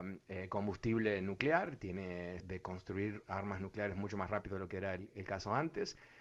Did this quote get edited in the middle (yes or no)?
yes